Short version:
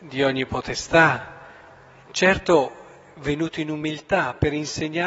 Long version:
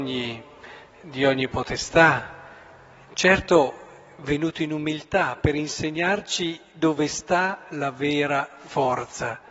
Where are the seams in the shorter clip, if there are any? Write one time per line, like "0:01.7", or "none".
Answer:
none